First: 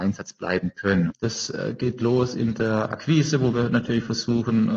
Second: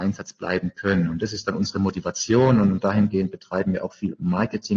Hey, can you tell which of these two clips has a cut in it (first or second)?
first